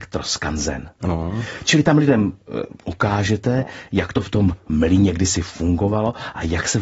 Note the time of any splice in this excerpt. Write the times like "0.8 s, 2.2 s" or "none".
1.0 s